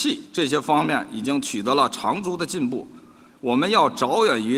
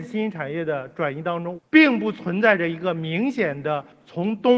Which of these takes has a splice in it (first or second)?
second